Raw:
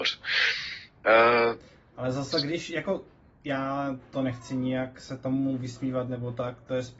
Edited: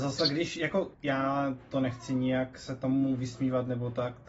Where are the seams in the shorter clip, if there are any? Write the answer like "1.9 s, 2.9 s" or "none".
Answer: 0.9 s